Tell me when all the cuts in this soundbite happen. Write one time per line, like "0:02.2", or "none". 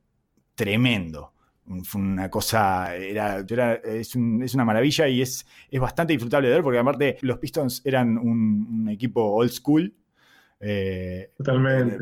0:03.5
0:07.2